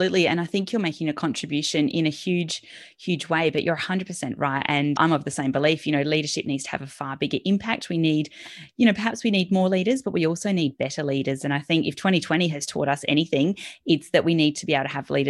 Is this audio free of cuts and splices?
no; 1 cut; at 5.0 s

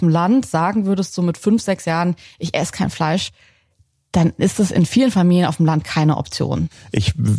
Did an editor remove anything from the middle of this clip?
no; 0 cuts

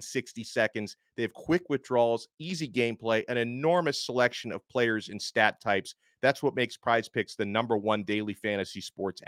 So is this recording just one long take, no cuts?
yes; 0 cuts

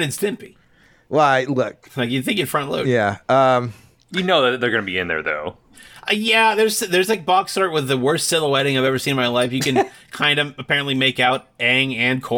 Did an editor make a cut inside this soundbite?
no; 0 cuts

